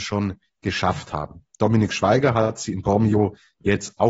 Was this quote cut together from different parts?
no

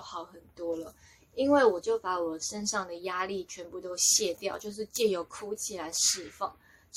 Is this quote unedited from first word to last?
yes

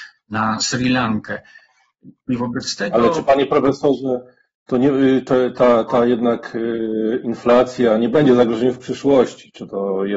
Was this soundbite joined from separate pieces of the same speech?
no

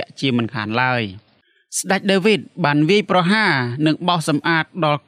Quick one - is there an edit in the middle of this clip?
no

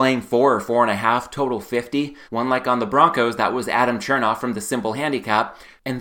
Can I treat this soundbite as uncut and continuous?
no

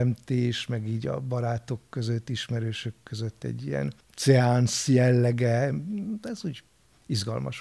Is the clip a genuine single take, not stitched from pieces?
no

